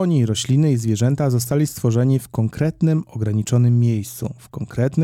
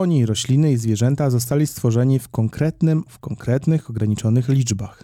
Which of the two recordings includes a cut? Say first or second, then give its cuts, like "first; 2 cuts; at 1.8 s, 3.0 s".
second; 1 cut; at 3.1 s